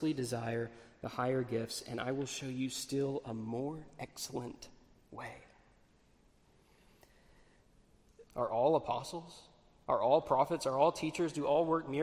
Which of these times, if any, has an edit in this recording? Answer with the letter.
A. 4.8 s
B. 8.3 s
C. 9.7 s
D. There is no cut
B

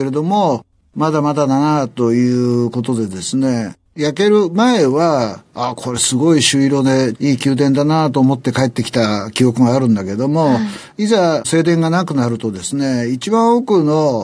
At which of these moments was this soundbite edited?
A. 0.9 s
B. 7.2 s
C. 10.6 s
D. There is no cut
B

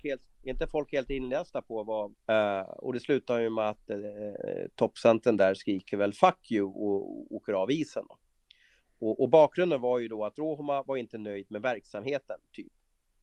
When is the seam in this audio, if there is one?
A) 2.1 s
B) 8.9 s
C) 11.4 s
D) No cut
A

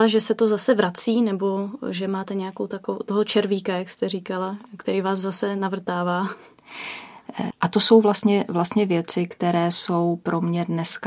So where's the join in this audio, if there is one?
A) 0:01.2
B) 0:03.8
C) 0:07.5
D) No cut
C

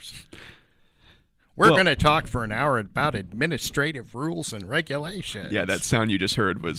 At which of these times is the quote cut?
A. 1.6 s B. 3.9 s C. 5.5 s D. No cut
D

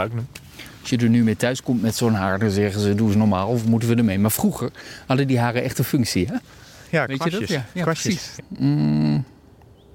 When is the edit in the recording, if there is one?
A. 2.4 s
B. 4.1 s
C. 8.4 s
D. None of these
C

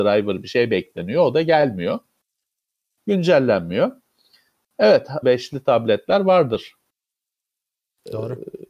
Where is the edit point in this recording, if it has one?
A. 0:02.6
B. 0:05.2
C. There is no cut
B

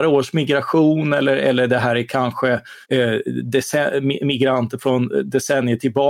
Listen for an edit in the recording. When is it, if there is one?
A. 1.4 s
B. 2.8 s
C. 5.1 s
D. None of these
B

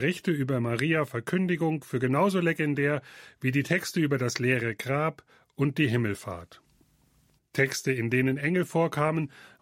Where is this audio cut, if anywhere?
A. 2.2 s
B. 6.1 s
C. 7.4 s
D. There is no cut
C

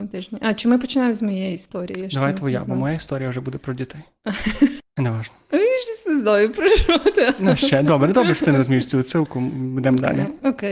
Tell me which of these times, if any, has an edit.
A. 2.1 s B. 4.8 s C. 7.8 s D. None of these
B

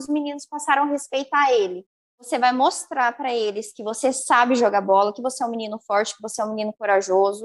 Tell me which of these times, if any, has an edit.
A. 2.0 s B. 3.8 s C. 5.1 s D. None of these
A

